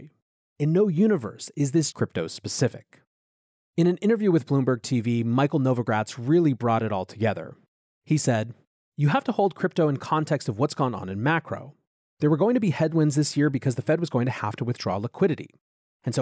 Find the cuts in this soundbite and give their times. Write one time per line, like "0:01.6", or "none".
0:01.9